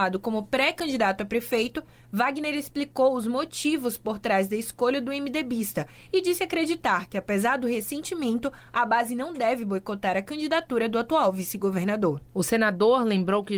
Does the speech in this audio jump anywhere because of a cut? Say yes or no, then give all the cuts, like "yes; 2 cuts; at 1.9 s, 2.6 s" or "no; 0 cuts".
yes; 1 cut; at 12.3 s